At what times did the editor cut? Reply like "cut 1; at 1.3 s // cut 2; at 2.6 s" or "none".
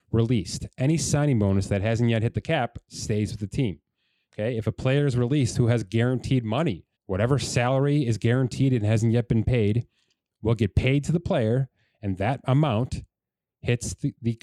cut 1; at 7.0 s